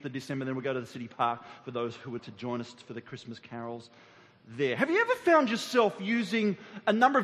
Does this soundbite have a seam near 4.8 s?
no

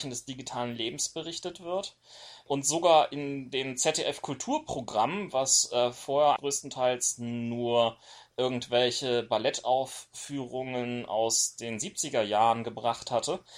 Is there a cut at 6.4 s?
yes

